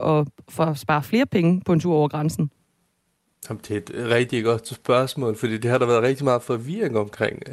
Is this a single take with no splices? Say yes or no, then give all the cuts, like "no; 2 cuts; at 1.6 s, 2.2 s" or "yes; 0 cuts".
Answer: yes; 0 cuts